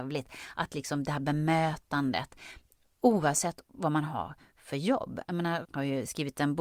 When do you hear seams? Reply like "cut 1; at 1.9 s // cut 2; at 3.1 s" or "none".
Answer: cut 1; at 5.6 s